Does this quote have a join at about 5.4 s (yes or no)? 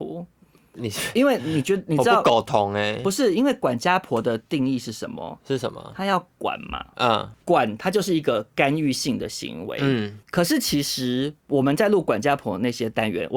no